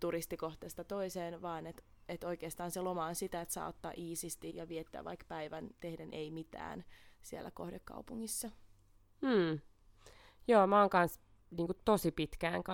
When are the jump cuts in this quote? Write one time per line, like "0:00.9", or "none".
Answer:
0:04.5

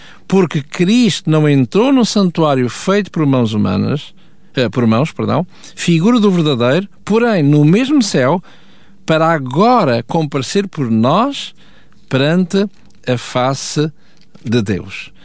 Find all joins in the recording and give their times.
none

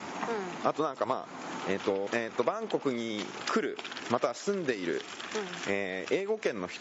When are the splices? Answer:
0:02.1

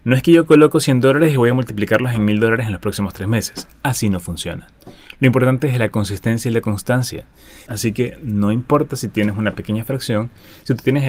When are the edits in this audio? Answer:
0:07.7

